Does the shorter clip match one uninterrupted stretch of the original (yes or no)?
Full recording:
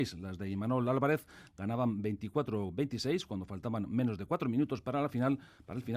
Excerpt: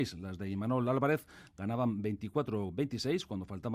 yes